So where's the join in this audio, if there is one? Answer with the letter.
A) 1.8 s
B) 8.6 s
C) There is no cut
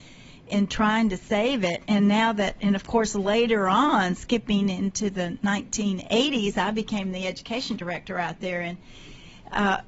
C